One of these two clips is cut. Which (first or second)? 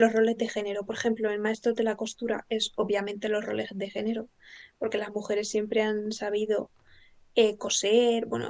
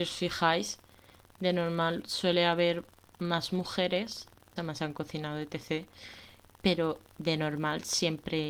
second